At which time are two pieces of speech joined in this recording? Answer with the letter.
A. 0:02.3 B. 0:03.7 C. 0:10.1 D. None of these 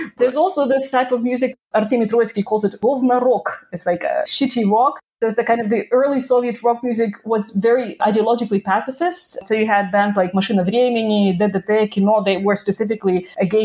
A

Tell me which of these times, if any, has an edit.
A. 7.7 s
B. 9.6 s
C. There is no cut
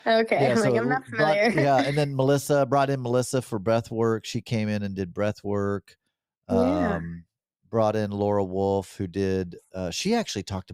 C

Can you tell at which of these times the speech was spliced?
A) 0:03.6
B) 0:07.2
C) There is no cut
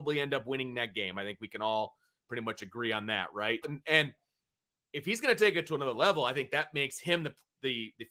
A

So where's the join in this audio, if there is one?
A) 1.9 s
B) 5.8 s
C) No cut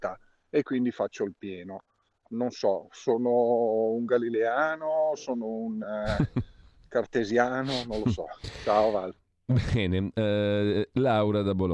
C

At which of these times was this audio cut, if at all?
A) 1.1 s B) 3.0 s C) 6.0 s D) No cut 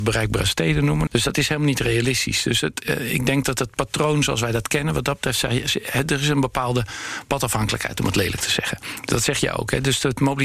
A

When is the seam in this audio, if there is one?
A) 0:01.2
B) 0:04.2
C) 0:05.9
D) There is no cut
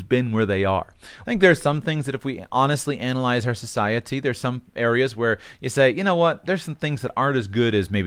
A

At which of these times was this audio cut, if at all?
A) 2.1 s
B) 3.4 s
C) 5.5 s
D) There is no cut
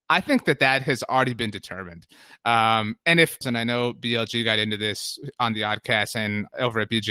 B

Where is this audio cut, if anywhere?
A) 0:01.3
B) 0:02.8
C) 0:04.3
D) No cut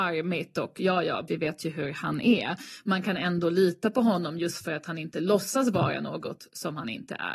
A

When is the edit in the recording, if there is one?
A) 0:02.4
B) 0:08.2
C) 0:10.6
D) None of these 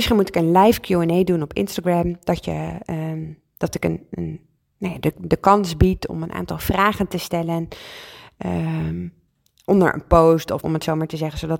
C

